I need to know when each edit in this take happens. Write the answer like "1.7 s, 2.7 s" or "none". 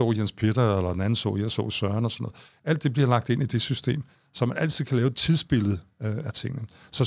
none

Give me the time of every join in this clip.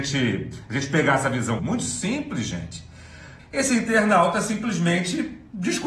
1.6 s, 3.4 s

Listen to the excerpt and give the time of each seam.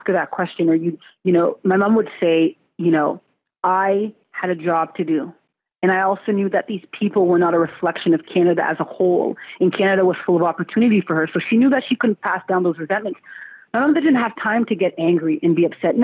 none

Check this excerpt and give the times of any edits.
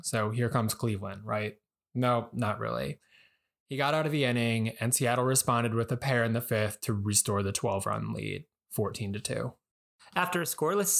none

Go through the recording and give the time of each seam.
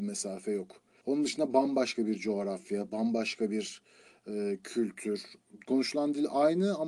1.0 s

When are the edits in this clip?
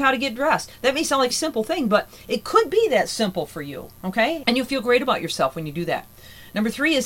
1.3 s, 4.4 s

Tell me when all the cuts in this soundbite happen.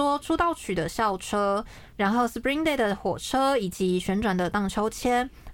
none

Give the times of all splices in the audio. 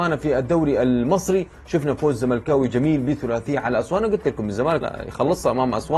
4.8 s

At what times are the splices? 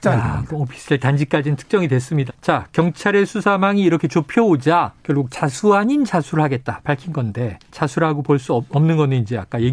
2.3 s, 5.0 s, 7.6 s

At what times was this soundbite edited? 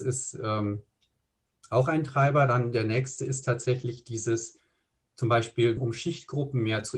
5.8 s

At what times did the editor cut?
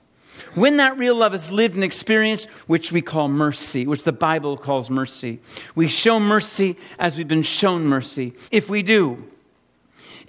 2.6 s, 8.5 s

